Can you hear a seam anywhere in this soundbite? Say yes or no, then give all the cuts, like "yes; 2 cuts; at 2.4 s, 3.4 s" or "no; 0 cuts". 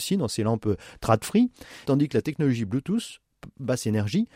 yes; 1 cut; at 1.8 s